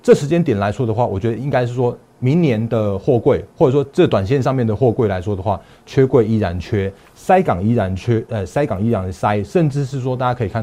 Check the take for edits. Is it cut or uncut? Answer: uncut